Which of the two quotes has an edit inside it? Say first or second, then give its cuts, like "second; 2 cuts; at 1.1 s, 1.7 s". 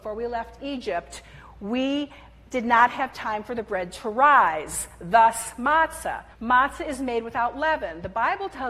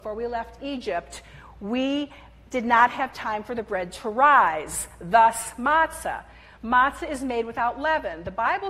first; 1 cut; at 6.3 s